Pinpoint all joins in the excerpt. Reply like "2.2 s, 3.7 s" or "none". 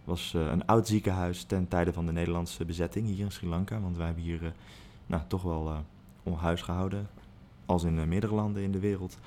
none